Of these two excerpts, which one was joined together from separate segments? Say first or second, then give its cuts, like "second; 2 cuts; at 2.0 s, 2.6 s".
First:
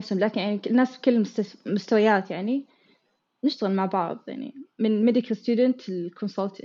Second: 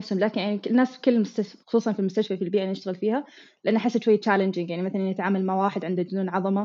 second; 1 cut; at 1.6 s